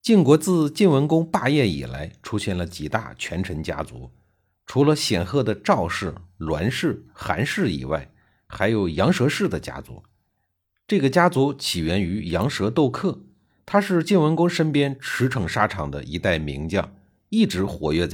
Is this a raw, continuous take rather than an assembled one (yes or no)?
yes